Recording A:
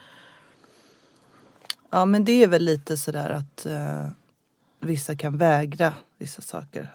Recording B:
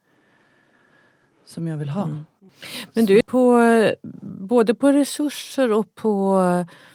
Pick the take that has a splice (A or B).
B